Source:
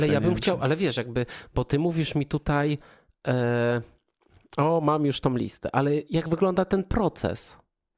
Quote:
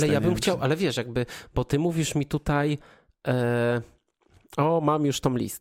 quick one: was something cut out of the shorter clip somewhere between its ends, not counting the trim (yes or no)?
no